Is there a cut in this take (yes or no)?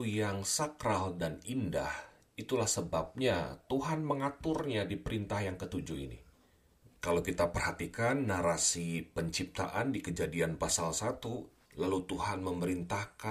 yes